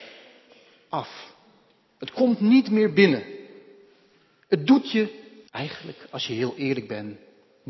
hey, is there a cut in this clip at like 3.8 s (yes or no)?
no